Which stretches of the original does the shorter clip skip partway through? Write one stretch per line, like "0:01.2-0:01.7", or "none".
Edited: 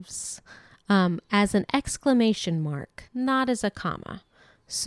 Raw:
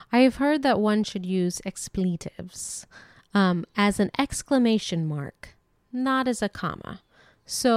0:05.5-0:05.9